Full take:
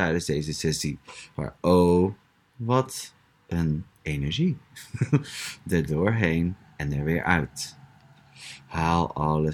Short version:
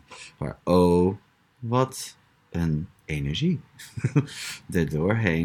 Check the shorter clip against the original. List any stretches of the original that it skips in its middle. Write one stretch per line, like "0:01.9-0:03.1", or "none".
none